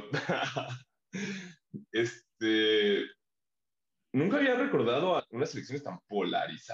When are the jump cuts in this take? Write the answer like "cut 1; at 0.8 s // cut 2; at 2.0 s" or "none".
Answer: cut 1; at 5.2 s